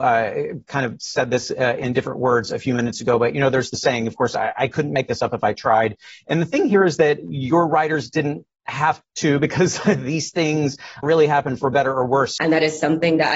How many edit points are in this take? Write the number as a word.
two